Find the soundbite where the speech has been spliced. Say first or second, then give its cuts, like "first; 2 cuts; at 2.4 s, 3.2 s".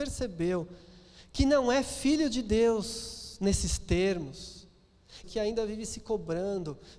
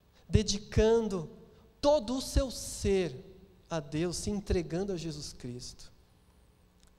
first; 1 cut; at 5.2 s